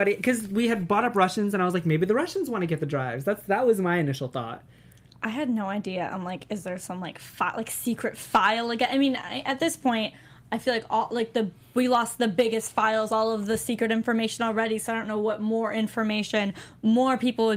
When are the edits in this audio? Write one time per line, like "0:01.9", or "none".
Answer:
none